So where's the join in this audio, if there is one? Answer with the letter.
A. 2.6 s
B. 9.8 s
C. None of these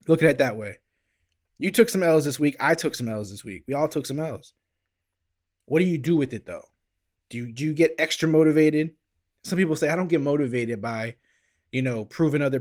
C